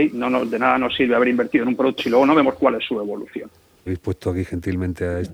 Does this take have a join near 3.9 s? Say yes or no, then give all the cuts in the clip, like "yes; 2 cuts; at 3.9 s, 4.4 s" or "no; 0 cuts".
yes; 2 cuts; at 2.0 s, 3.9 s